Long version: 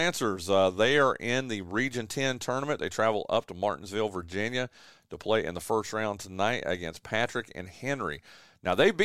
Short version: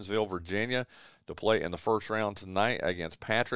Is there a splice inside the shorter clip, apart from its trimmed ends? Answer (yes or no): no